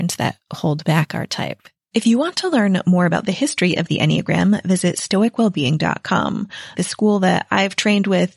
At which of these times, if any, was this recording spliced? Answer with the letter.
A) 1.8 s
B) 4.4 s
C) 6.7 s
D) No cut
C